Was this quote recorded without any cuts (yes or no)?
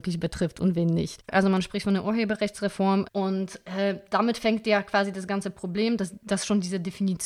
no